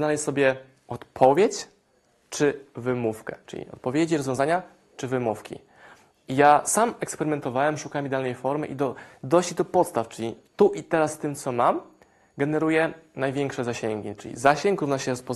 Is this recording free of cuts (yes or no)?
yes